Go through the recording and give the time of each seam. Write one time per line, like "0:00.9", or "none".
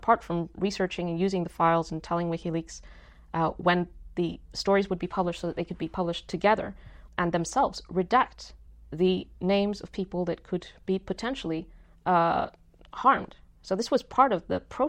0:07.1